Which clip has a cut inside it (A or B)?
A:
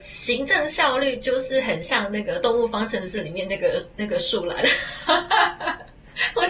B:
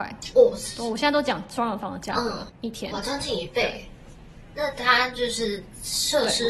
B